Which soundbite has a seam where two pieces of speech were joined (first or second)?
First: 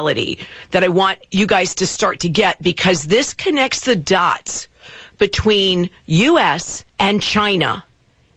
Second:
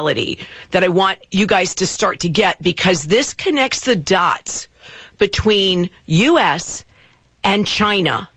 first